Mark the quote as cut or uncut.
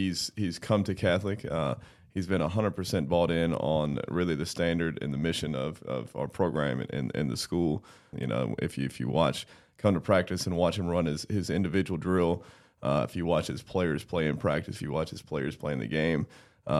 cut